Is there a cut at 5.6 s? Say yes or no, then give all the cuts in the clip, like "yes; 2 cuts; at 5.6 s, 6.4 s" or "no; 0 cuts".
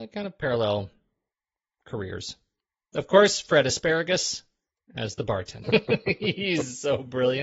yes; 1 cut; at 5.6 s